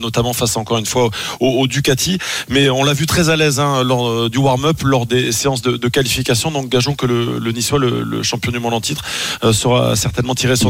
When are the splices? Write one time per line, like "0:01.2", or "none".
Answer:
none